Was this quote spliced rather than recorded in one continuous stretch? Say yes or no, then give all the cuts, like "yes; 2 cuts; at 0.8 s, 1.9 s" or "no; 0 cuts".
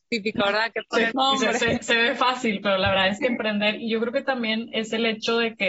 yes; 1 cut; at 1.1 s